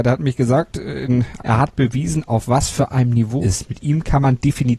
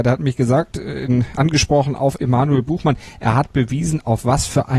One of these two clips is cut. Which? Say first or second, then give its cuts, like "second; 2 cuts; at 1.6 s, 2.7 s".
first; 2 cuts; at 1.4 s, 3.4 s